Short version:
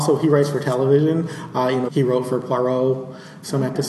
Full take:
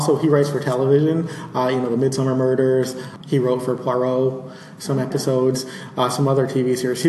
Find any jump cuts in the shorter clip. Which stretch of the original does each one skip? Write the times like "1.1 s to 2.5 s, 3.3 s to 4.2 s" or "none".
1.9 s to 3.2 s